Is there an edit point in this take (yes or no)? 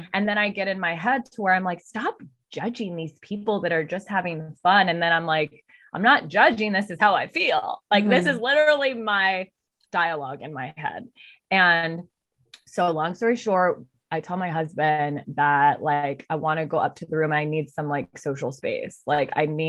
no